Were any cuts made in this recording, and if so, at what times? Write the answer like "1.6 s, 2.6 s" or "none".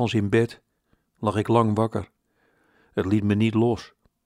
none